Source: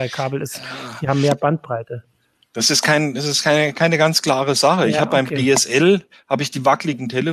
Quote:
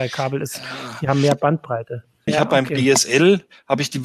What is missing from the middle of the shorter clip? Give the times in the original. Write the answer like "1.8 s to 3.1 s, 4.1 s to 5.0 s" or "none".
2.3 s to 4.9 s